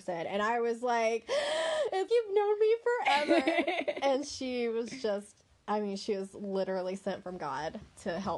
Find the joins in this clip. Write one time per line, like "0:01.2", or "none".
0:02.1